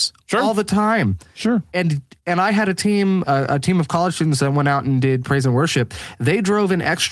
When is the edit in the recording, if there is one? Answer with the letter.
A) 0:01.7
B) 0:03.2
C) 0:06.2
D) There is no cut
B